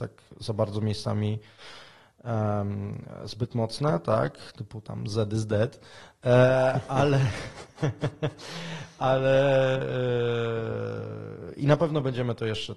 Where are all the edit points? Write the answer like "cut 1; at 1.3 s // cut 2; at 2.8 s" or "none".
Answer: none